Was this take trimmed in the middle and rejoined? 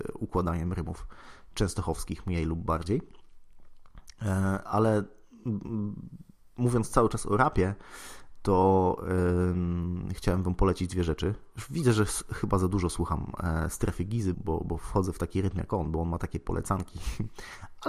yes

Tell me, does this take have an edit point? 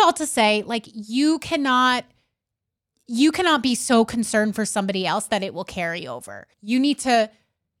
yes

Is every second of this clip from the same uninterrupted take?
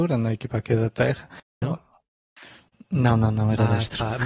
no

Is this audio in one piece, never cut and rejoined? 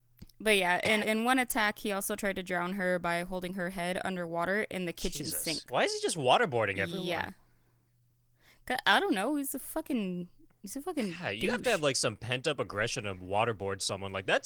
no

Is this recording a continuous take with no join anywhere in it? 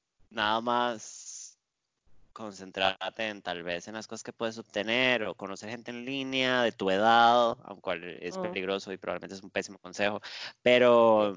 yes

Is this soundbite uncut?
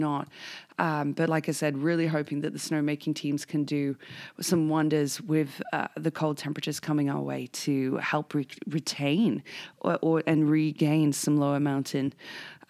yes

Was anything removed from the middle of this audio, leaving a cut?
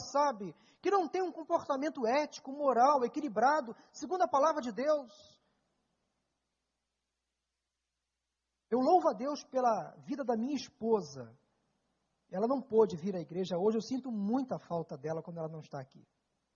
no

